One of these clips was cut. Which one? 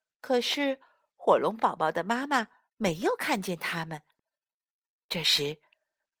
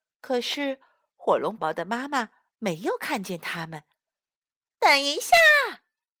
second; 2 cuts; at 1.6 s, 4.7 s

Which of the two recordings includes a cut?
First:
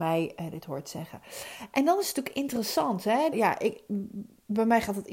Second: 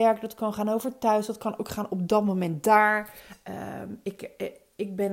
first; 1 cut; at 3.3 s

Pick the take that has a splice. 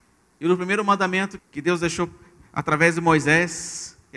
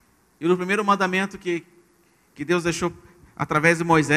first; 1 cut; at 1.4 s

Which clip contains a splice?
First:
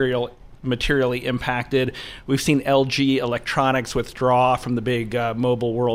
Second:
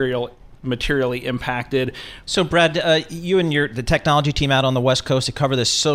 second; 1 cut; at 2.2 s

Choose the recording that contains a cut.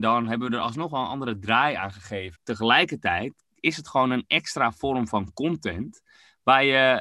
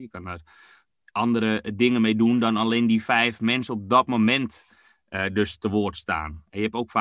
first; 1 cut; at 2.4 s

